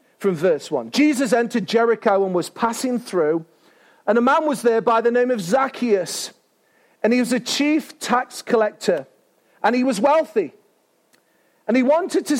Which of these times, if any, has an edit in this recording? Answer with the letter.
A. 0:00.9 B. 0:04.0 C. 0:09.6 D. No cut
D